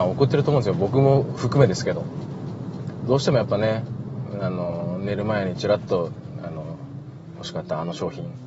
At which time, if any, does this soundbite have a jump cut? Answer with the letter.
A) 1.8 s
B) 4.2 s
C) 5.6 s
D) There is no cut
D